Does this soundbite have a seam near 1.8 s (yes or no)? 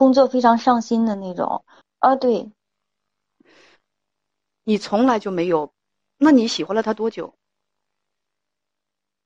yes